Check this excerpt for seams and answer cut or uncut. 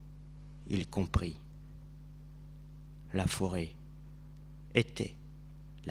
uncut